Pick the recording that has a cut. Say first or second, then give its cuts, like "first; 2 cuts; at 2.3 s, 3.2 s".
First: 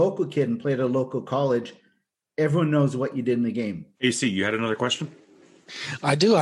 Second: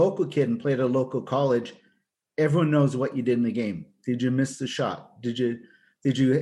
first; 1 cut; at 3.9 s